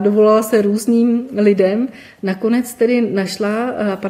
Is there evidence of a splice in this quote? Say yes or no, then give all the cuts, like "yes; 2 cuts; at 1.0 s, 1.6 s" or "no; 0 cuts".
no; 0 cuts